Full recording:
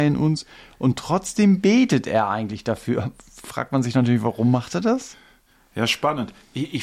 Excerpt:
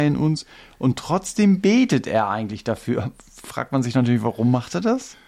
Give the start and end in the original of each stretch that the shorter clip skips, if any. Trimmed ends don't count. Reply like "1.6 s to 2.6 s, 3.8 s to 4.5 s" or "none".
none